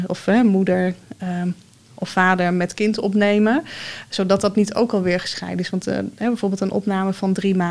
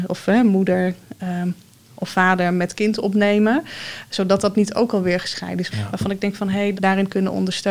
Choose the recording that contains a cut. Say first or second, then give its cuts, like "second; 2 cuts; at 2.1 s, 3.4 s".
second; 2 cuts; at 5.7 s, 6.8 s